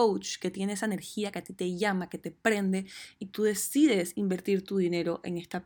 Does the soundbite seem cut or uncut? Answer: uncut